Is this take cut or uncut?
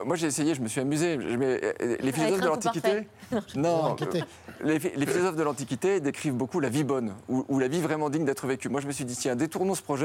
uncut